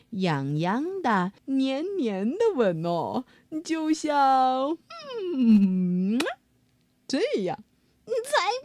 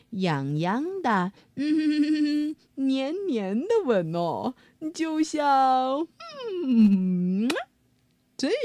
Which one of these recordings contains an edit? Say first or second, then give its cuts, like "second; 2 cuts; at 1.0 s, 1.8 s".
first; 1 cut; at 1.4 s